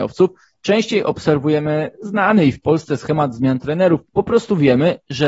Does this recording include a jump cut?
yes; 1 cut; at 4.1 s

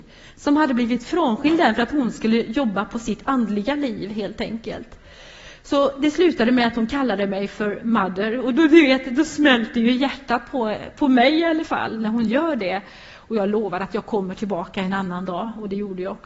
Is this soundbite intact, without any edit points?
yes; 0 cuts

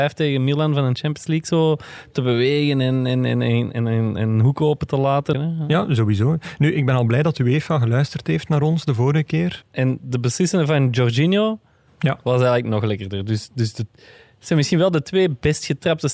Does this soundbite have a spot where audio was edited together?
yes; 2 cuts; at 5.3 s, 9.6 s

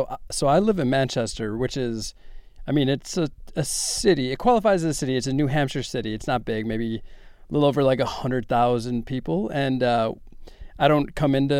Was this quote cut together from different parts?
no; 0 cuts

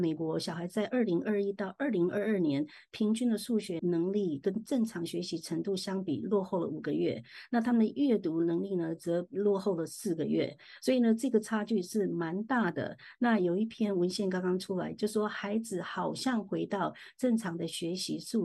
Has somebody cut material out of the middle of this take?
yes; 1 cut; at 3.8 s

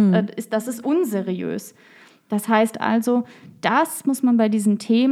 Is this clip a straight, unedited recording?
yes; 0 cuts

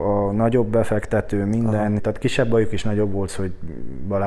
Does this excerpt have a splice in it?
yes; 2 cuts; at 2.0 s, 3.3 s

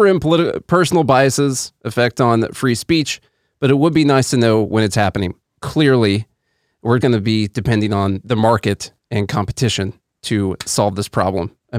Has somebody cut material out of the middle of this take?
yes; 2 cuts; at 5.6 s, 7.0 s

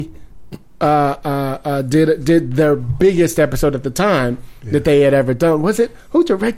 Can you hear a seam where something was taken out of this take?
no; 0 cuts

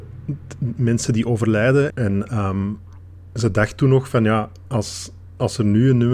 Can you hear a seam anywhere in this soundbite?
yes; 1 cut; at 1.9 s

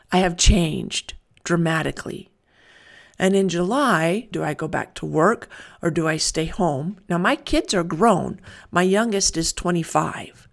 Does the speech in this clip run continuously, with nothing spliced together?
no; 1 cut; at 4.3 s

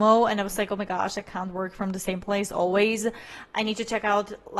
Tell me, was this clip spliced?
no; 0 cuts

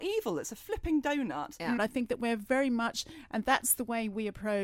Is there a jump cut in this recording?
yes; 1 cut; at 1.8 s

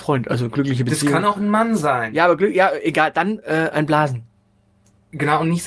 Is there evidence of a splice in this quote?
no; 0 cuts

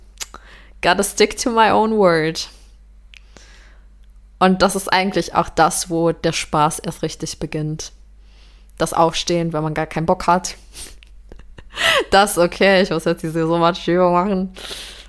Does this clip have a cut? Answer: no; 0 cuts

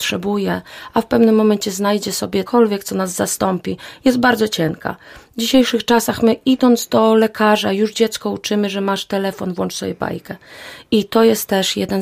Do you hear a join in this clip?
yes; 1 cut; at 2.5 s

